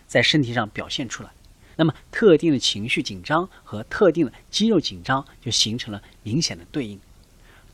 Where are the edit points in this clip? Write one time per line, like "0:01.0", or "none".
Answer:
0:01.7